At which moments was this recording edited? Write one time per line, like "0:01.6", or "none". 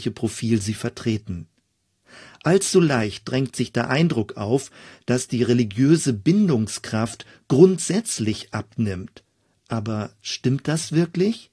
0:02.3